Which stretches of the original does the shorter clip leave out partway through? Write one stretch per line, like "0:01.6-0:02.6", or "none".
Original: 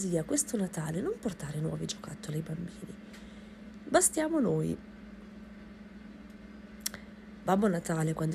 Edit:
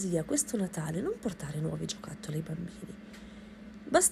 none